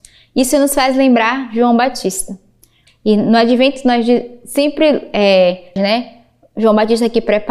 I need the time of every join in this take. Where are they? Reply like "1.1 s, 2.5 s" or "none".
2.9 s, 5.8 s